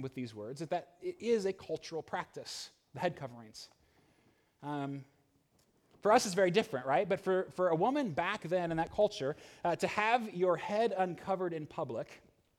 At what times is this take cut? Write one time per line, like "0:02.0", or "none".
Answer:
none